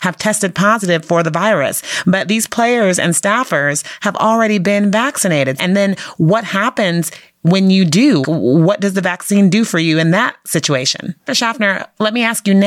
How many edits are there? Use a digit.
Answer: 3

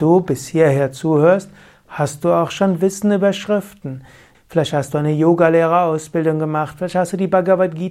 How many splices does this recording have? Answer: 1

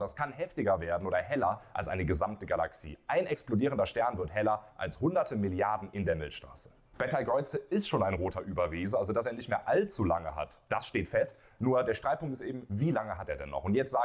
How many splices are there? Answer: 0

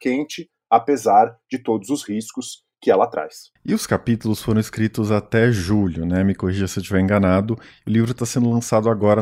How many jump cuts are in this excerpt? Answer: 1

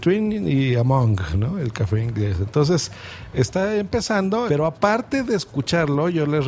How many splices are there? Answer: 2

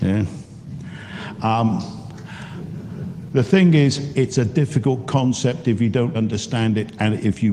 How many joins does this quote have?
2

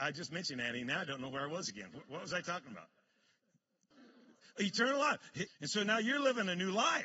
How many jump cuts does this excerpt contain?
2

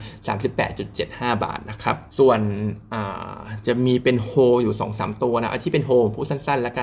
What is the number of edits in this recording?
1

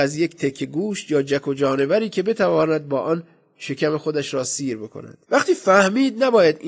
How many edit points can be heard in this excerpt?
1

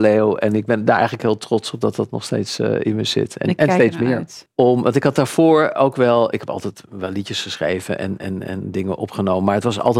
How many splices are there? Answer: 1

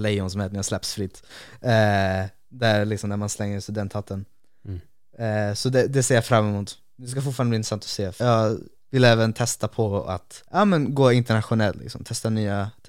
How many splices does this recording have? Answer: 2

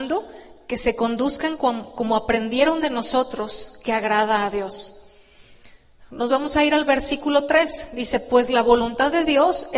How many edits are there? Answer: 0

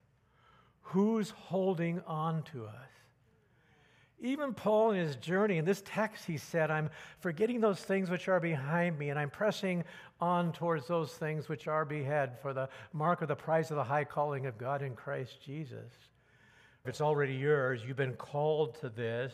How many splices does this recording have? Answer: 1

